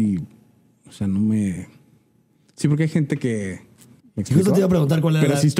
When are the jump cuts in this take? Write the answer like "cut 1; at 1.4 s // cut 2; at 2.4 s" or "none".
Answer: cut 1; at 4.0 s